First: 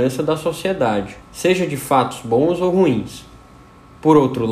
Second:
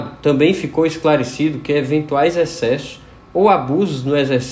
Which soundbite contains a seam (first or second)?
first